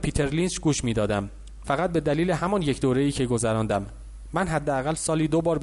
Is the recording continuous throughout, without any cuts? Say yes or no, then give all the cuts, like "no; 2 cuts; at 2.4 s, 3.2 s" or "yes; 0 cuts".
no; 1 cut; at 1.6 s